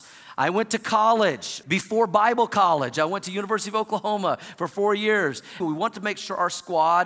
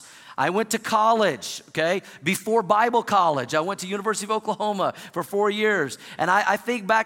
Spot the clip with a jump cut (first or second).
first